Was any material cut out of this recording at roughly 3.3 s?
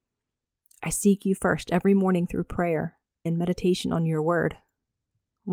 yes; 1 cut; at 3.3 s

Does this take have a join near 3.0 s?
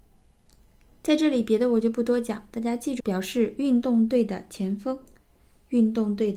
yes; 1 cut; at 3.0 s

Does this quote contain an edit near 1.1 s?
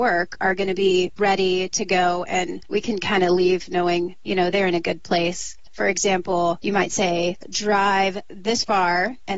no; 1 cut; at 5.7 s

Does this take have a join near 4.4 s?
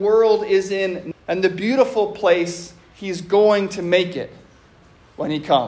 no; 1 cut; at 1.1 s

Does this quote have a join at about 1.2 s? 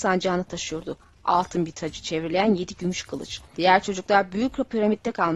no; 1 cut; at 3.5 s

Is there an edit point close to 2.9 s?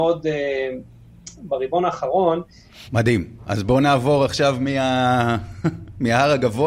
yes; 1 cut; at 2.9 s

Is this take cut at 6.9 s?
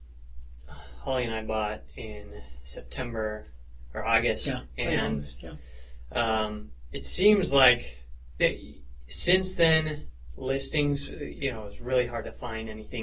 no; 0 cuts

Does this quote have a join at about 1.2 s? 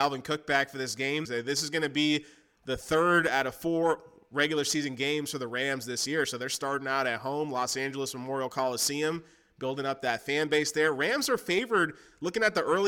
yes; 1 cut; at 1.2 s

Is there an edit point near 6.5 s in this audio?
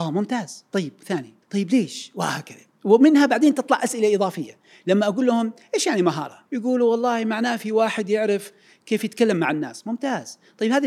yes; 2 cuts; at 1.4 s, 6.5 s

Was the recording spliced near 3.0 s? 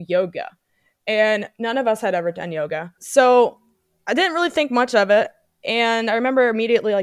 yes; 1 cut; at 3.0 s

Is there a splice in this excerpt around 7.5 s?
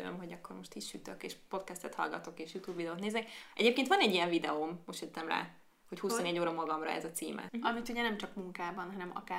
yes; 1 cut; at 7.5 s

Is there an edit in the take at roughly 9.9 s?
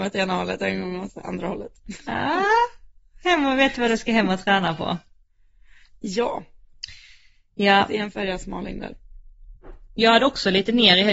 yes; 1 cut; at 9.9 s

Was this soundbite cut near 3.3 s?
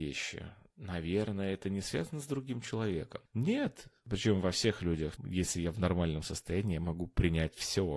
yes; 2 cuts; at 3.3 s, 5.2 s

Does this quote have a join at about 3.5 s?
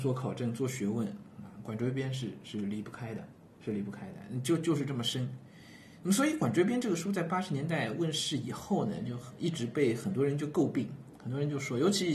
yes; 1 cut; at 3.5 s

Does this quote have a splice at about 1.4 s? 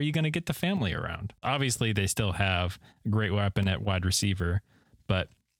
yes; 1 cut; at 1.4 s

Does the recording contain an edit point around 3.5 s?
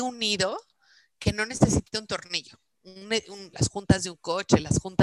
yes; 1 cut; at 3.5 s

